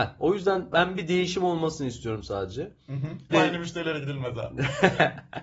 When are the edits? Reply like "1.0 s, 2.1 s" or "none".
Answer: 3.3 s